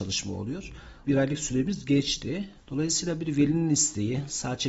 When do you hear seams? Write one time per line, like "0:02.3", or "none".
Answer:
0:01.0
0:02.6